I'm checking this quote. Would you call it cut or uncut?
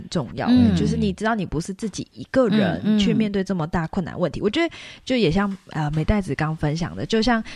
uncut